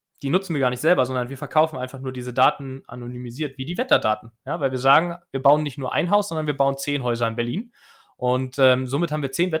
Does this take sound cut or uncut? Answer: uncut